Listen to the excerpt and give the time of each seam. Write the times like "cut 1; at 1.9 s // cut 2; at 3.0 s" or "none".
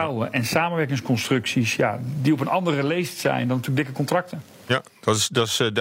none